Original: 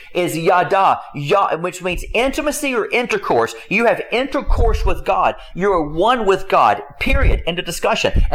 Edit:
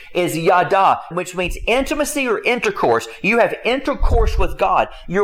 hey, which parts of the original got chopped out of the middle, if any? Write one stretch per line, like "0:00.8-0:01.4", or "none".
0:01.1-0:01.6